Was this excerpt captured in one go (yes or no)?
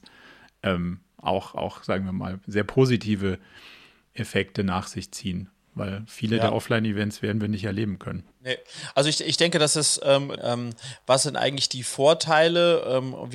no